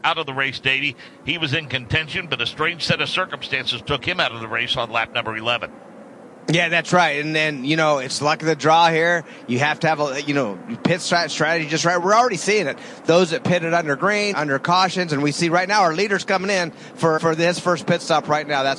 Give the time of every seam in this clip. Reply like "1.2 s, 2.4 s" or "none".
14.3 s, 17.2 s